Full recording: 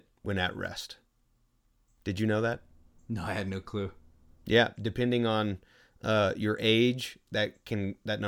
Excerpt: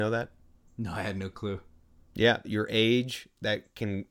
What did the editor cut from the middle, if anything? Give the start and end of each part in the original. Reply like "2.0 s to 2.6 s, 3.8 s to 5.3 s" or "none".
4.8 s to 6.3 s